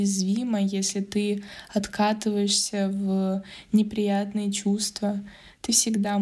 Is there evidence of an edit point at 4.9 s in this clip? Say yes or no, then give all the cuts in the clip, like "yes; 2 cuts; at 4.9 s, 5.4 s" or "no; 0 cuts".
no; 0 cuts